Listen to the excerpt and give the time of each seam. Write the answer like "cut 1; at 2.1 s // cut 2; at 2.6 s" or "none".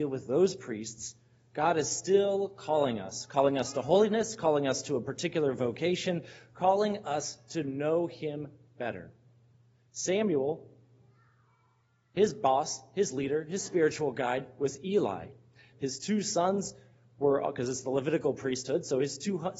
cut 1; at 15.7 s